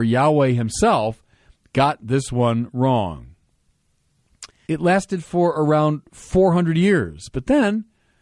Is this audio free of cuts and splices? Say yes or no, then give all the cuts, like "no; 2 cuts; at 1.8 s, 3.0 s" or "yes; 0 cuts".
no; 1 cut; at 4.7 s